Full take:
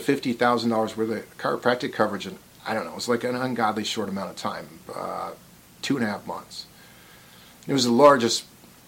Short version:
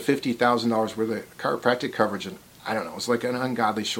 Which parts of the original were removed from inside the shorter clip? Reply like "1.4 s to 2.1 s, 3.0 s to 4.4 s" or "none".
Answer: none